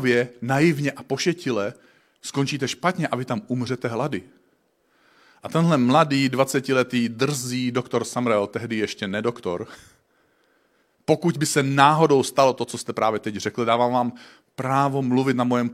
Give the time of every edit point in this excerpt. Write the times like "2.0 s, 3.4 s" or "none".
10.9 s